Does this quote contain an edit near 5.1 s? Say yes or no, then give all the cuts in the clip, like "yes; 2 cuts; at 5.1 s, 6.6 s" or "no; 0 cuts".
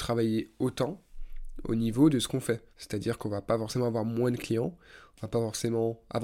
no; 1 cut; at 2.7 s